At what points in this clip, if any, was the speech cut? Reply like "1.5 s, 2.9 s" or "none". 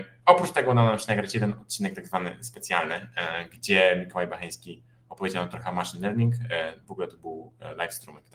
none

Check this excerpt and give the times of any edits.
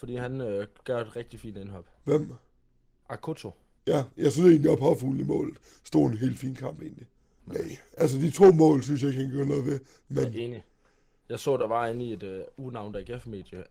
7.4 s

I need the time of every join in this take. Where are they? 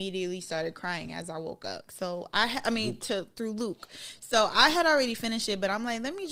1.9 s

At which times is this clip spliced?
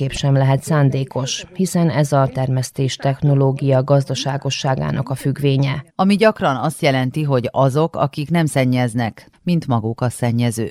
5.9 s, 9.3 s

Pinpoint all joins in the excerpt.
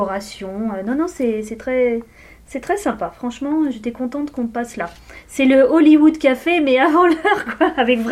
none

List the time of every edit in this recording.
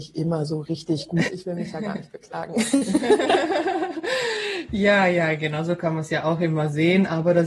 1.3 s

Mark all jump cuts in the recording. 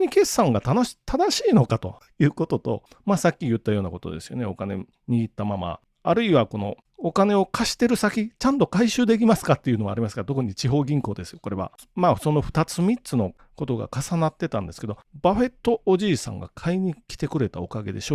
none

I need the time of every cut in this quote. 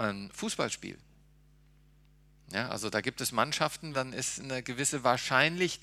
3.9 s

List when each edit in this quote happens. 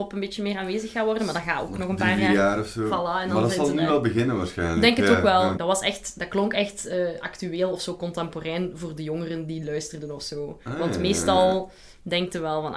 5.6 s

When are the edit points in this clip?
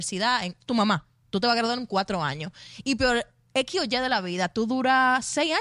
none

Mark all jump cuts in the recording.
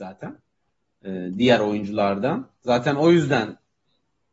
none

